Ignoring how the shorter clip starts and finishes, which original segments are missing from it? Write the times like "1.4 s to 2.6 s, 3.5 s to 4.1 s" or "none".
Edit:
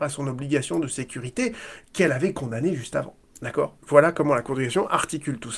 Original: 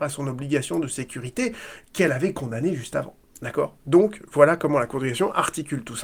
3.8 s to 4.3 s